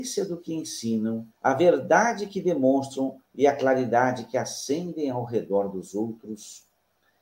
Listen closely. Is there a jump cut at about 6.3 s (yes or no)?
no